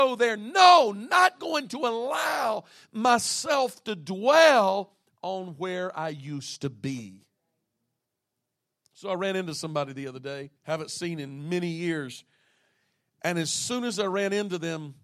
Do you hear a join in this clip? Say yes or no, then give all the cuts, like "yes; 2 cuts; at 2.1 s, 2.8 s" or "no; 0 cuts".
yes; 1 cut; at 10.6 s